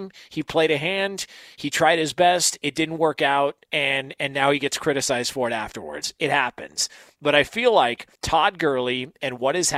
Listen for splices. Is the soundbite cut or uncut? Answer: cut